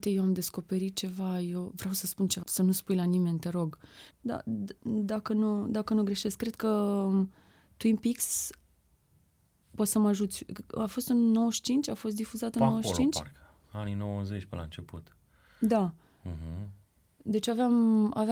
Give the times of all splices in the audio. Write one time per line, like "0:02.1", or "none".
0:02.4
0:04.1